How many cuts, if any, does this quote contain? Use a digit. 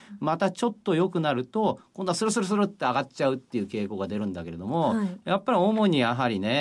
0